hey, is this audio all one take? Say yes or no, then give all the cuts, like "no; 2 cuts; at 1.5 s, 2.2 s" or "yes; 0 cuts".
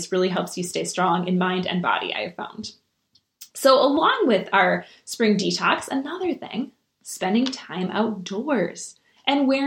yes; 0 cuts